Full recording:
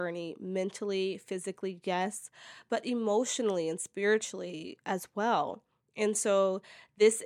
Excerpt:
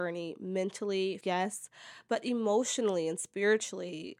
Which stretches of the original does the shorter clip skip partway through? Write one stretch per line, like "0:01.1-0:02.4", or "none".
0:01.2-0:01.8

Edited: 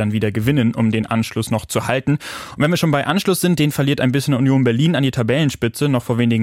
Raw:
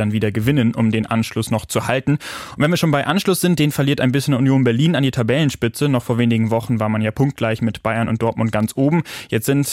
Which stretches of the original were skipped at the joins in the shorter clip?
none

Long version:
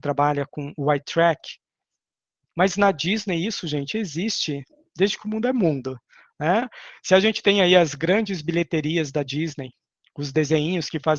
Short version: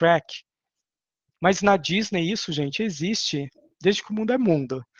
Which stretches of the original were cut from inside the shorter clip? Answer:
none

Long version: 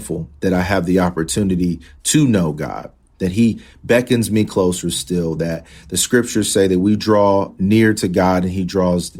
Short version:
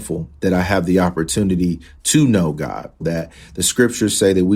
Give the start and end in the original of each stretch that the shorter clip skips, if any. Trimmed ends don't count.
0:03.0-0:05.3

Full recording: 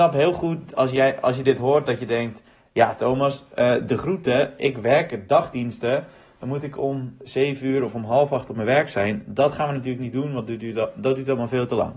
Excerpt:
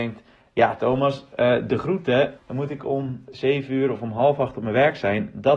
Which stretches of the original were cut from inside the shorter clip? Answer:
0:04.6-0:06.3

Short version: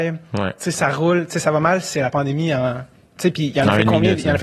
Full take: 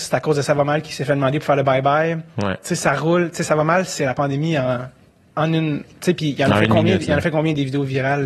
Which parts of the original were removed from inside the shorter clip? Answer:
0:05.2-0:06.0

